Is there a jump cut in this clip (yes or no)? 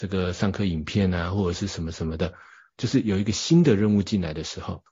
yes